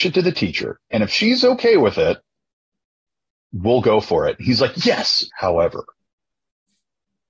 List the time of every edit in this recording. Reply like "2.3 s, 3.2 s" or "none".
5.3 s